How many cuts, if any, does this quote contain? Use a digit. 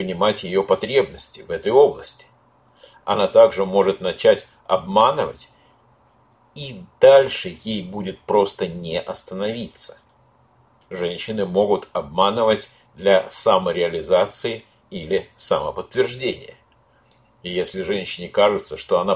1